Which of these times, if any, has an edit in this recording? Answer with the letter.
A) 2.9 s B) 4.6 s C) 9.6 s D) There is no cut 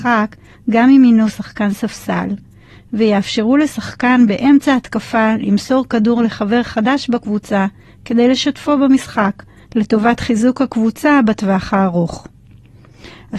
C